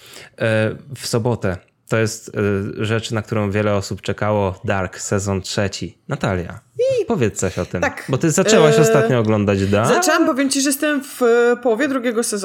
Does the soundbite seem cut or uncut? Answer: uncut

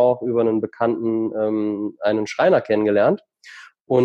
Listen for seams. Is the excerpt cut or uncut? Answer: uncut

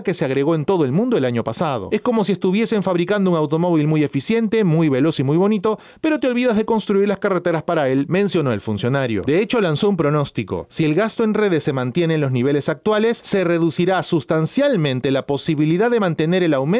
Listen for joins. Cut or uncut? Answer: uncut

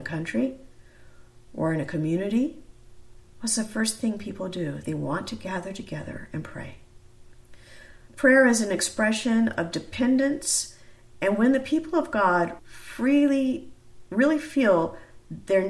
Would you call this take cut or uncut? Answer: cut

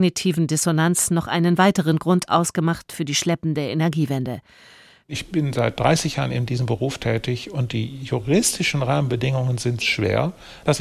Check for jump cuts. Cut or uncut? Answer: cut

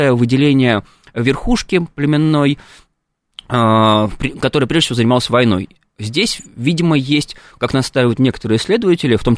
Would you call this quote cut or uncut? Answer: uncut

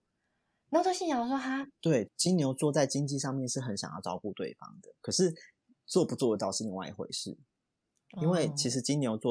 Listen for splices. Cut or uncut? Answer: cut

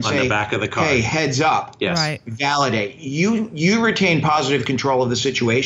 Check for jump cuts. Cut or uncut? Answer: uncut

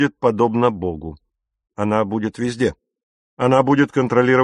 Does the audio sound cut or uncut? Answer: uncut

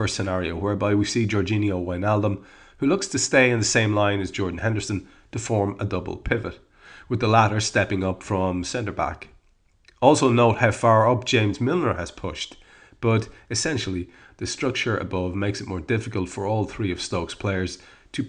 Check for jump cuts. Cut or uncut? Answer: uncut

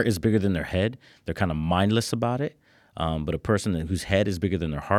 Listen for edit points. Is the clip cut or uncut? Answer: uncut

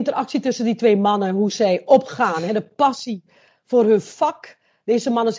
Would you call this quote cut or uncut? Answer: uncut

